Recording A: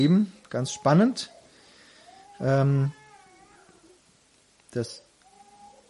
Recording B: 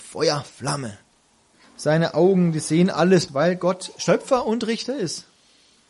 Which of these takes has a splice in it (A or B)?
B